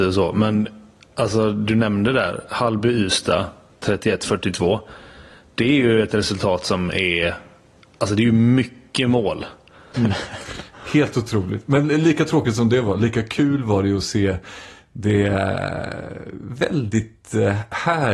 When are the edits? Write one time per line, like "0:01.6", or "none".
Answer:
0:09.9